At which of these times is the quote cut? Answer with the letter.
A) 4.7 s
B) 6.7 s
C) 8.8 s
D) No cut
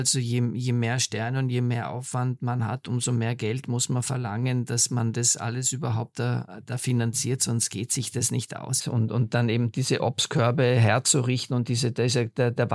C